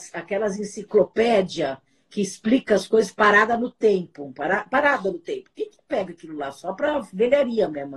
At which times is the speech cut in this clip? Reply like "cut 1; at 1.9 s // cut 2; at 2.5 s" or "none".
none

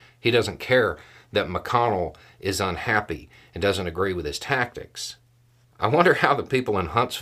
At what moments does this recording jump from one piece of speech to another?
cut 1; at 5.6 s

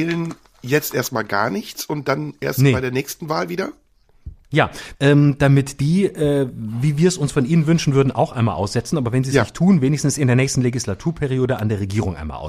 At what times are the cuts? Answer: cut 1; at 4.9 s

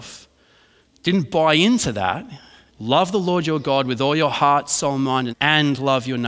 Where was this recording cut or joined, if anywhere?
cut 1; at 2.7 s // cut 2; at 5.3 s

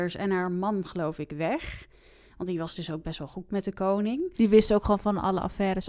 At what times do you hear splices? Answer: none

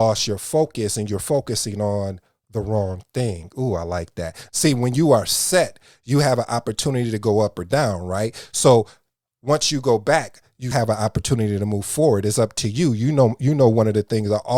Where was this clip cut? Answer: cut 1; at 4.5 s // cut 2; at 10.7 s

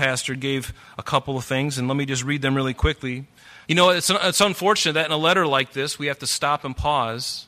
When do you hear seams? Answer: cut 1; at 3.6 s

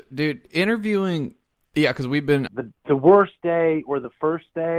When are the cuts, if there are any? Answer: cut 1; at 2.5 s

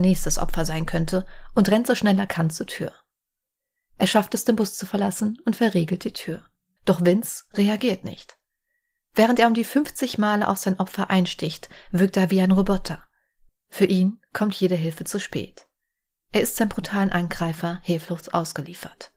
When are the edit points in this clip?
cut 1; at 6.8 s // cut 2; at 13.5 s

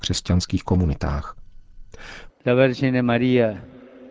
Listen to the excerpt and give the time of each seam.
cut 1; at 2.3 s

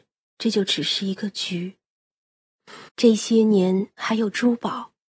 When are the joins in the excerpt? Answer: cut 1; at 2.9 s // cut 2; at 4.0 s

